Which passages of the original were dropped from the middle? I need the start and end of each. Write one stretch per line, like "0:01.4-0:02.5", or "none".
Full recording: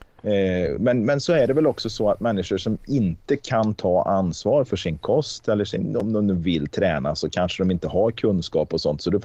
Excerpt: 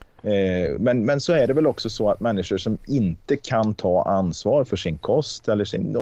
none